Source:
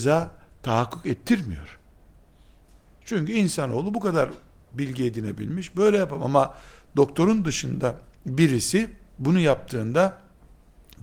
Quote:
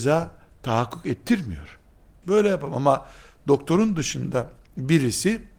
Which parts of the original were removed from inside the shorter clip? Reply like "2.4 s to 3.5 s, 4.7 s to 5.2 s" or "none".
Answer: 2.2 s to 5.7 s